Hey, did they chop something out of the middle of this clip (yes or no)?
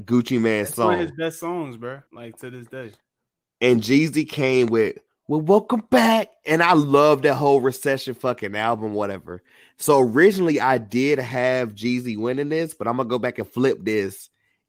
yes